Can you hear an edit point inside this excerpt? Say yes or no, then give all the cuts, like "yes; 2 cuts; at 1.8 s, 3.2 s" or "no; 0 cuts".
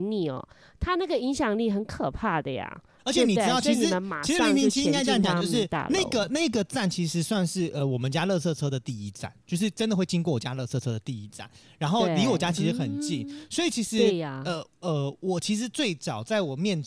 no; 0 cuts